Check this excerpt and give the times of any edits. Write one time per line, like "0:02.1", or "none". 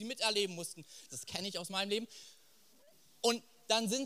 0:01.1